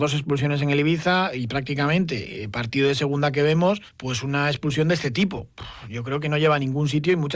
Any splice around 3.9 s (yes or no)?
yes